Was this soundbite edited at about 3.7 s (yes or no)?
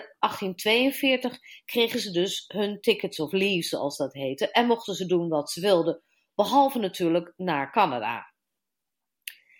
no